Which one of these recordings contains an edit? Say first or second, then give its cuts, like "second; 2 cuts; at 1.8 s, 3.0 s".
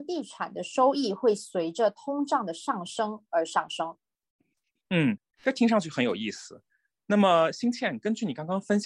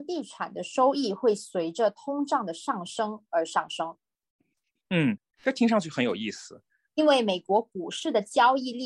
second; 1 cut; at 6.9 s